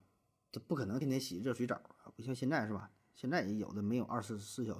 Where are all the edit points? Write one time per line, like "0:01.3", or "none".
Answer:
0:01.0